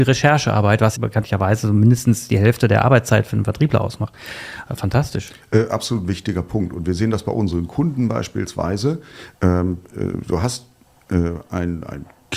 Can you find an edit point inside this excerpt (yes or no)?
yes